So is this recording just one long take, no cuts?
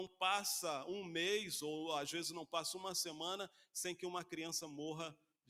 yes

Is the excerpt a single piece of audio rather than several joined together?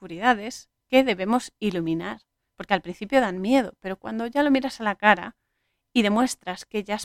yes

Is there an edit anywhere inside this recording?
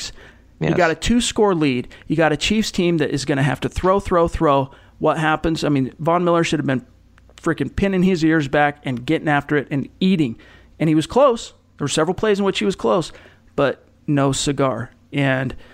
no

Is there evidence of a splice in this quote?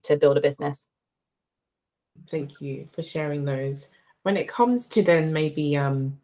yes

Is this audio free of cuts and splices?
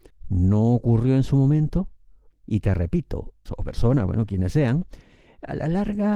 no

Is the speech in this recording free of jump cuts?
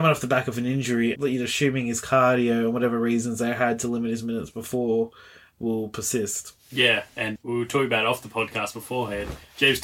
no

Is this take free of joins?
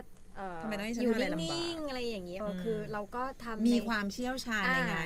no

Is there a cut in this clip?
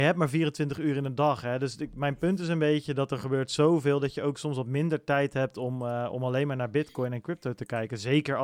no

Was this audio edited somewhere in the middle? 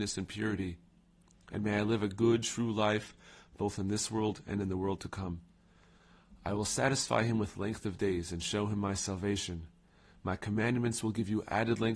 no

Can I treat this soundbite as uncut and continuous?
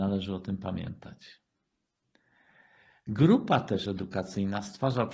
yes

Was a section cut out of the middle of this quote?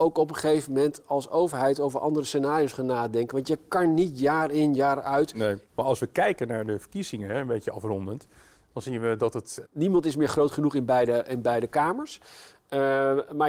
yes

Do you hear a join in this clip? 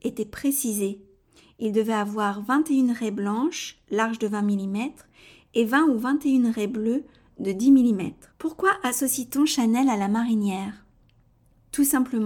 yes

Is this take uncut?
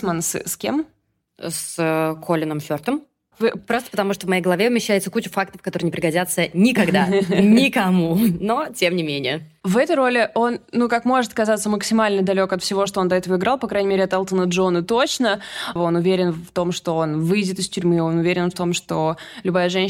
no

